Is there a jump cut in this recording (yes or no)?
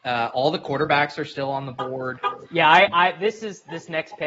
yes